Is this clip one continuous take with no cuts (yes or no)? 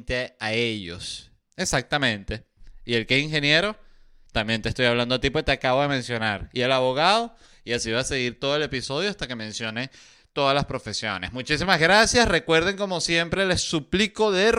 no